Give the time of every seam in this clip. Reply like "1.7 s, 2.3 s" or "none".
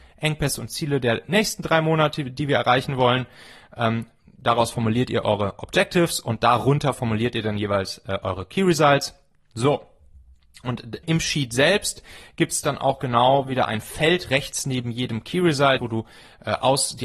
9.5 s, 11.0 s, 15.8 s